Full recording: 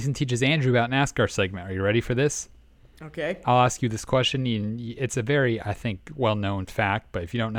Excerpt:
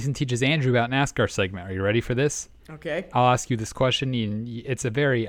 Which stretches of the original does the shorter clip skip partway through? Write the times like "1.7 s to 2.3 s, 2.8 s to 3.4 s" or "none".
2.6 s to 2.9 s